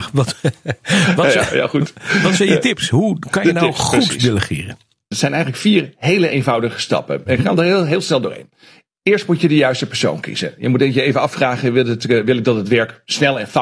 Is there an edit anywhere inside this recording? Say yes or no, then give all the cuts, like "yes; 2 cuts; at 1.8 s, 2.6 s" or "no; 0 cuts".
yes; 1 cut; at 5.1 s